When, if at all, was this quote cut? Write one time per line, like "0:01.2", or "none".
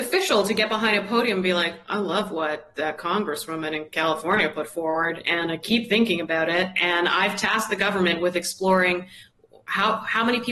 none